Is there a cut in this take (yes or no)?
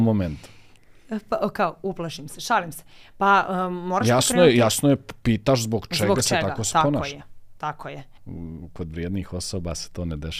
yes